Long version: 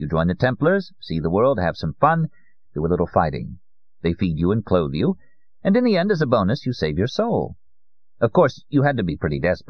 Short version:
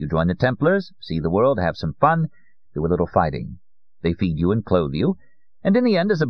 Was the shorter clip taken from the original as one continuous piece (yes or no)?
yes